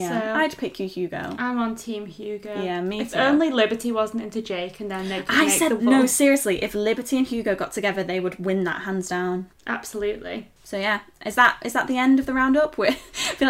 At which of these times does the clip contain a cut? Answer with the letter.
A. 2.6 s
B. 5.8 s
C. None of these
B